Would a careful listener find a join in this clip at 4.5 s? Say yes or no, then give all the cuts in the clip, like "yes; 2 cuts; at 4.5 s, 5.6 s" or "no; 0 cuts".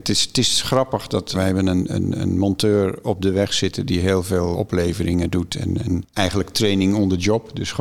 yes; 2 cuts; at 1.3 s, 4.5 s